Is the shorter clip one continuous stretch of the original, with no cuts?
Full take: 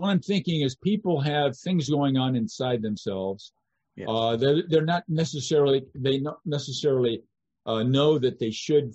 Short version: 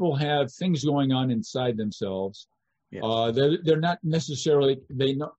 yes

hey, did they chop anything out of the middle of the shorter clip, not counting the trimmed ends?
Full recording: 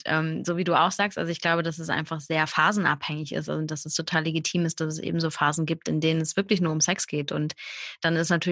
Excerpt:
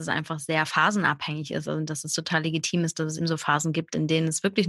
yes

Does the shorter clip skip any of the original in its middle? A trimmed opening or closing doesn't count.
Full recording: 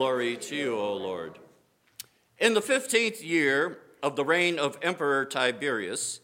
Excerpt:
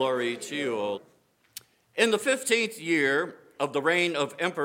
yes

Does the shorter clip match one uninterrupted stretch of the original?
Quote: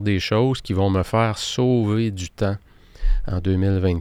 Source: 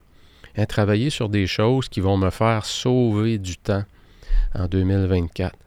yes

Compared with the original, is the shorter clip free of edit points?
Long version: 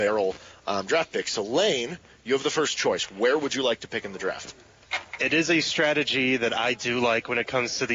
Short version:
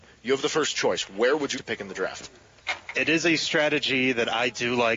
no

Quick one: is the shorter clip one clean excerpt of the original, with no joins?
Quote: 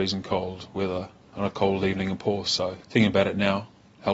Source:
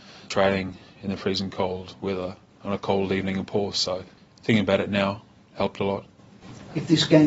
no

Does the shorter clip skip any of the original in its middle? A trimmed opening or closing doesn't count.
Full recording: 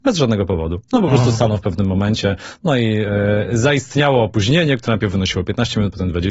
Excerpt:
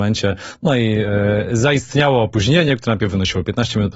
no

